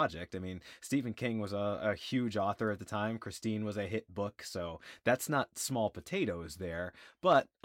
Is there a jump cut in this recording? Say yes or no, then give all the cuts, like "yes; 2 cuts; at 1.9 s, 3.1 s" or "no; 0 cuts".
no; 0 cuts